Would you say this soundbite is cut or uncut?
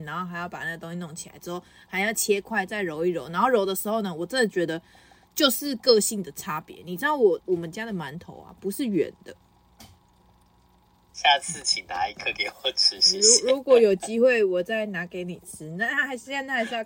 cut